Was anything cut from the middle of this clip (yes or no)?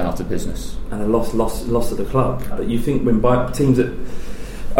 yes